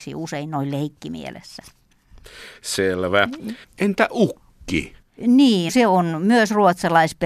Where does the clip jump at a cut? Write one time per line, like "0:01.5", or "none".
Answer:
0:03.6
0:05.2